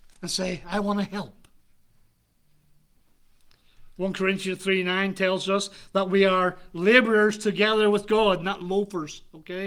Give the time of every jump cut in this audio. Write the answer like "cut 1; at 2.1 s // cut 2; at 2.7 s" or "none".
none